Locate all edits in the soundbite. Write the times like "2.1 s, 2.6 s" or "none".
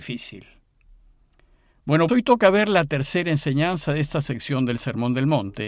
2.1 s

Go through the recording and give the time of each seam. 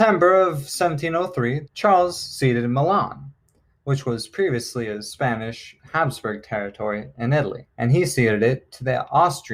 1.7 s, 7.7 s

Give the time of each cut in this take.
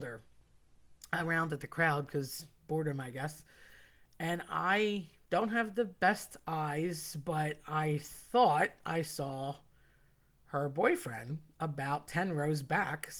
none

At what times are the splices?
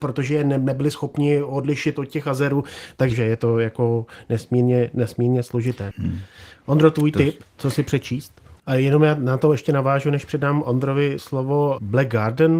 5.9 s, 8.6 s

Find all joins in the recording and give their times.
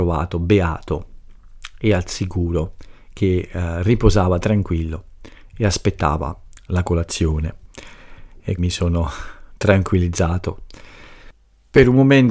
8.6 s

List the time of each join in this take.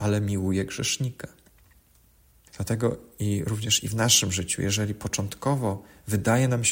2.5 s

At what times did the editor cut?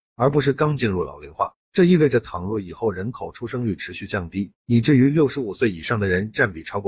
4.6 s

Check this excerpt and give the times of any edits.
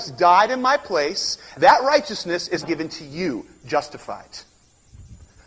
1.5 s, 2.6 s

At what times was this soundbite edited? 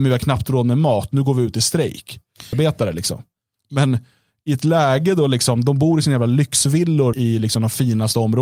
2.5 s, 7.1 s

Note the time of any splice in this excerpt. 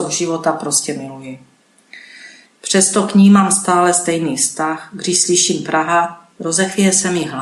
2.5 s

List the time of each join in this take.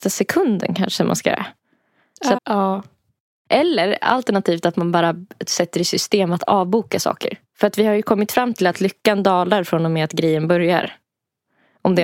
2.4 s

